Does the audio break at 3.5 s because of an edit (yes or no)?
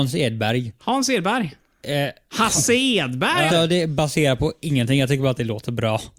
yes